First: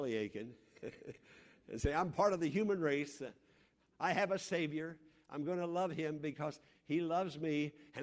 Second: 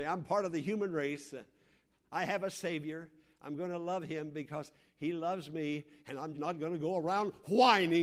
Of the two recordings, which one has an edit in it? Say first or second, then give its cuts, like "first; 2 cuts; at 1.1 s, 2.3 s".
second; 1 cut; at 6.3 s